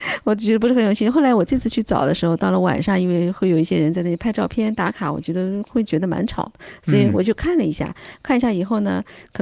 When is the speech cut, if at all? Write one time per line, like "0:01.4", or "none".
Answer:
none

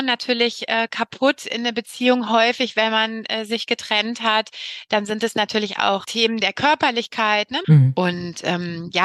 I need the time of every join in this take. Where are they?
0:07.6

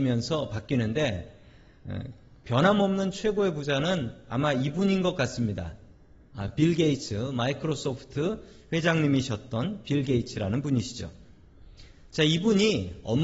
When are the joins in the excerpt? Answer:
none

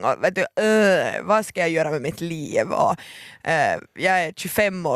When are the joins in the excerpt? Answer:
none

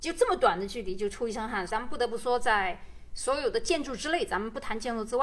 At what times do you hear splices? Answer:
0:01.7

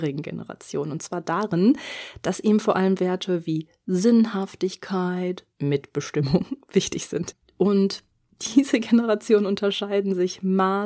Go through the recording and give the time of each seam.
0:05.5
0:07.4

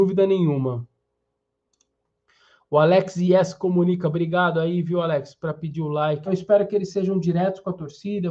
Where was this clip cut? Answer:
0:06.3

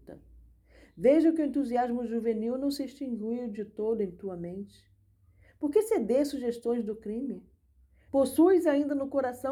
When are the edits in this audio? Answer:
0:08.1

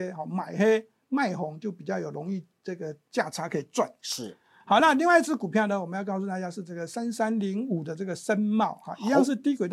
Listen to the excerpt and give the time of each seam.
none

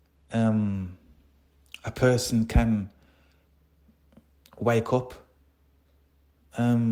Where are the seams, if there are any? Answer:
none

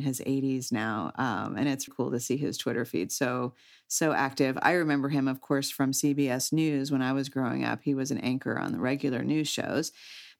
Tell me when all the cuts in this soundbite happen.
0:01.9

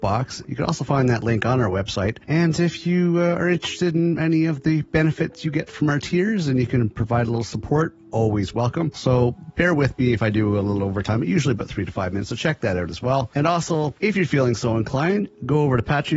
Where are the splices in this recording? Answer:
0:08.9

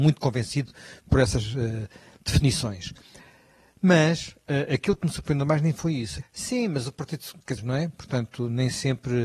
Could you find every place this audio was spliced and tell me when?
0:06.2
0:07.6

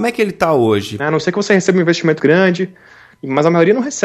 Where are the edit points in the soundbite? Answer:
0:01.0
0:02.2

